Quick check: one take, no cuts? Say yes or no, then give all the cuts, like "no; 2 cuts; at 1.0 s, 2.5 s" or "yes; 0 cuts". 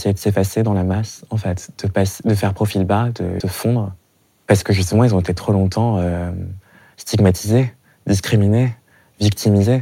no; 1 cut; at 3.4 s